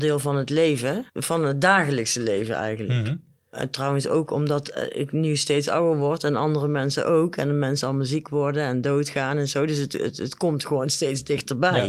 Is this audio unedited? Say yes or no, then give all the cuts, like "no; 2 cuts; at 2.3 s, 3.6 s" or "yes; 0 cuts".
no; 1 cut; at 1.1 s